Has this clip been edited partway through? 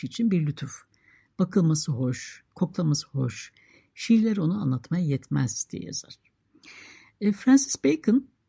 no; 0 cuts

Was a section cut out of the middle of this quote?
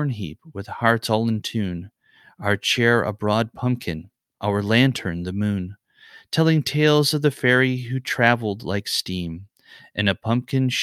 no; 0 cuts

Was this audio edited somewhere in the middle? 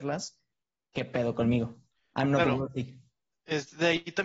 no; 0 cuts

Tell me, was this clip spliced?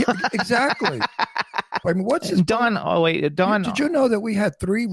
yes; 1 cut; at 1.8 s

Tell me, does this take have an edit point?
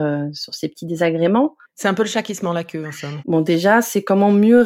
yes; 2 cuts; at 1.6 s, 3.2 s

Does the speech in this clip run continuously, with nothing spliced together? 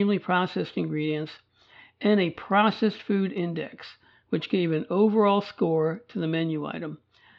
yes; 0 cuts

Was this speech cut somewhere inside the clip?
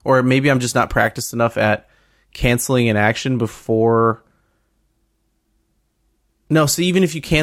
no; 0 cuts

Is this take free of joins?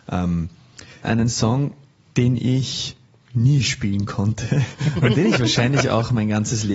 no; 1 cut; at 1.0 s

